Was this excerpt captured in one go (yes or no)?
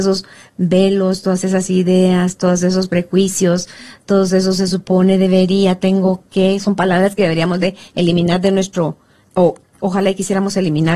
yes